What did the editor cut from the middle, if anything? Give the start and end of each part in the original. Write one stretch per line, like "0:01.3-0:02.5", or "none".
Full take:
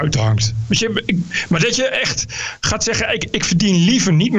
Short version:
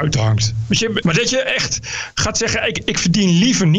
0:01.0-0:01.5